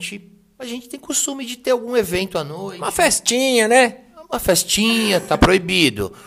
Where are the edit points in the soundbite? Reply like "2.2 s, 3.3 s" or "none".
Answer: none